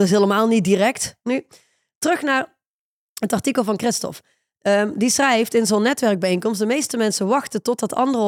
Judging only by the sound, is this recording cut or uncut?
cut